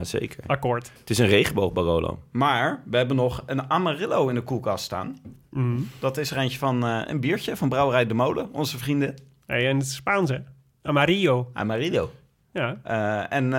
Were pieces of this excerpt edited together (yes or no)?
no